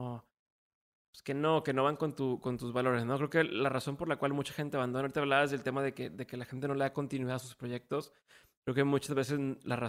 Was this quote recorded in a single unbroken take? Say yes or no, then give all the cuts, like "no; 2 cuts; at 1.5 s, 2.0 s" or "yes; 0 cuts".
yes; 0 cuts